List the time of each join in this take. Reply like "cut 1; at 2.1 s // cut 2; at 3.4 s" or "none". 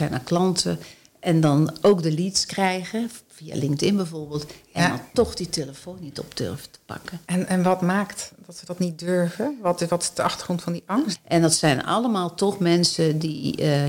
cut 1; at 11.1 s